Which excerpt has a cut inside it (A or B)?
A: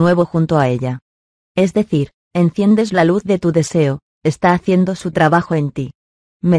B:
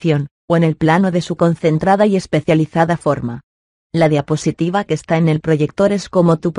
A